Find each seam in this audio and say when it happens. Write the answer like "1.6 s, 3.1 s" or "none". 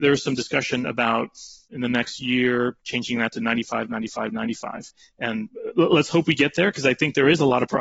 2.8 s